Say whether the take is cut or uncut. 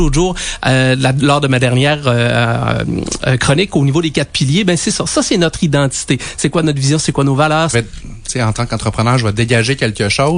cut